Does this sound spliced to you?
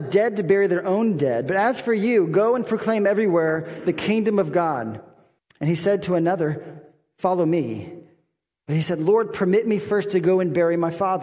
yes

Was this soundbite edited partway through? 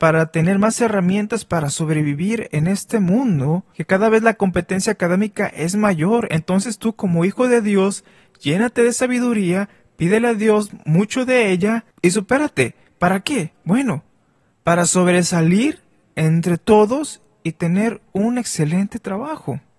no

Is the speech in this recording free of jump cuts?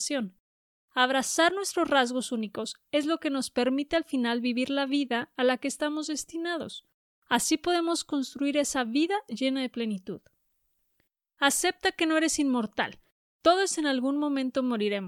yes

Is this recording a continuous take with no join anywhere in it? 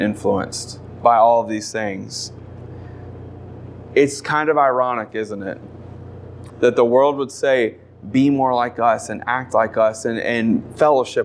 no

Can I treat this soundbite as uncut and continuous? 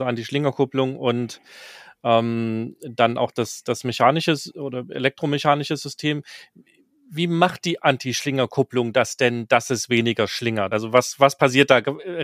yes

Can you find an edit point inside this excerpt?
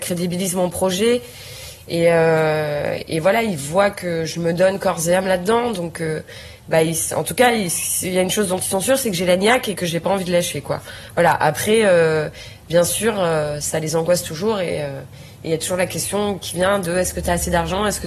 no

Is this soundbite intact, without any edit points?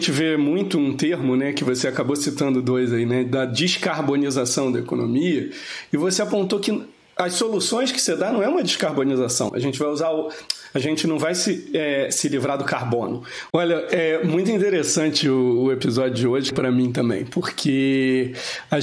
no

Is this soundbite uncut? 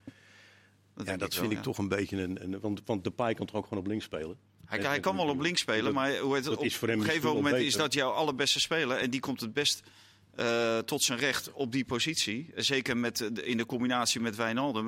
yes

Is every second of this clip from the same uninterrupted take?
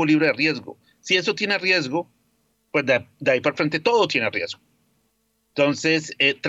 yes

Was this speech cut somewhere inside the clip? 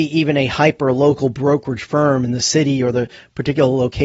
no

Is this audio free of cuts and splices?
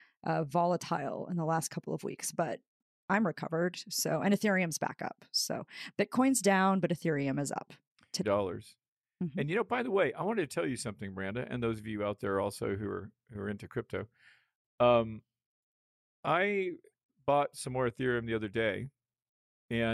no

